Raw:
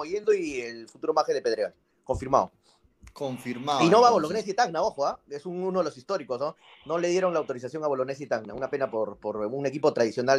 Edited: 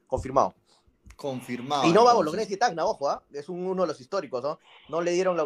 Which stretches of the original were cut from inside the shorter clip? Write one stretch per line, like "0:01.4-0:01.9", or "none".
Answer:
none